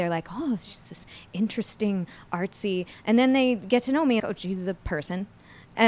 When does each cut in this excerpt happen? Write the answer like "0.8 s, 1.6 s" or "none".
4.2 s